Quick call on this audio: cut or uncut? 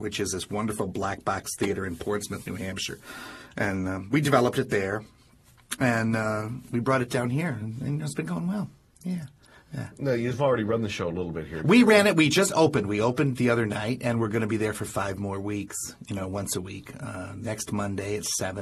uncut